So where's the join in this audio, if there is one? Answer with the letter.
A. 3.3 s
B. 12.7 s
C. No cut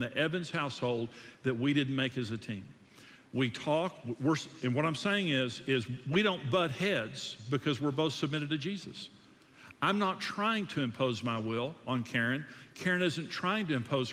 C